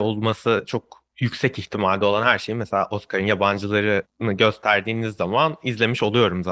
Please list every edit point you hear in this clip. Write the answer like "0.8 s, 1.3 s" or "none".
none